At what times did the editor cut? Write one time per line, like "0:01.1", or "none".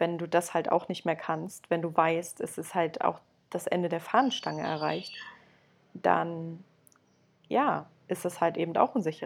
none

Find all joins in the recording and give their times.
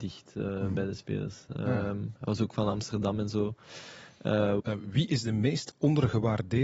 0:04.6

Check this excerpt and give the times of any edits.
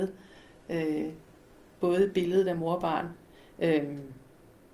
none

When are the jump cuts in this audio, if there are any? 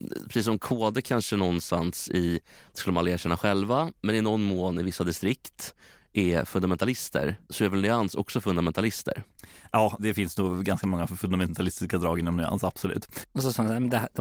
0:07.4
0:10.0
0:13.2

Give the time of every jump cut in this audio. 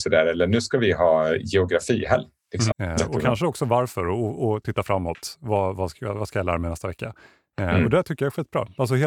0:02.7

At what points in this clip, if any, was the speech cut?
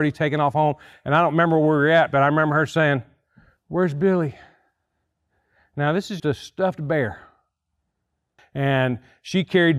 0:06.2
0:08.4

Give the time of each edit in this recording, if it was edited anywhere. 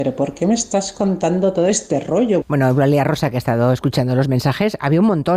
0:02.4

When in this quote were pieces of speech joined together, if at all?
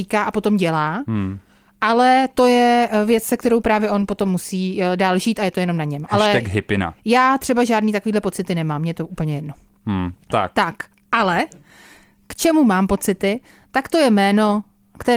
0:10.2

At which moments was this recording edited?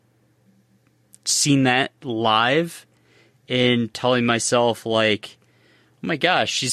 none

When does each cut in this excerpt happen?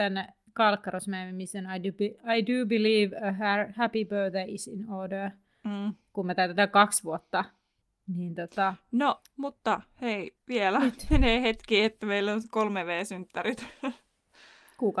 none

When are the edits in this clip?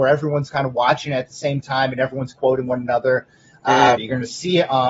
0:04.0

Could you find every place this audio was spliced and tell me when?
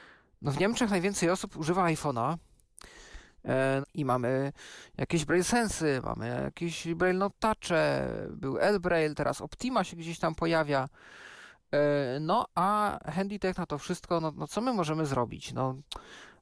0:03.8

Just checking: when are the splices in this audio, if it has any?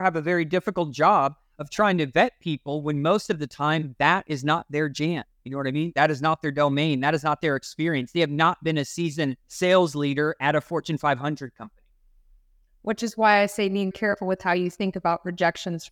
0:09.4
0:13.9

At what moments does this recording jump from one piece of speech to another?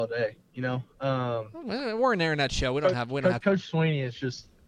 0:03.4

